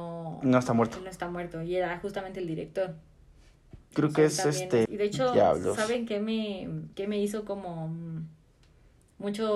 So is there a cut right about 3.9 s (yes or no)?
yes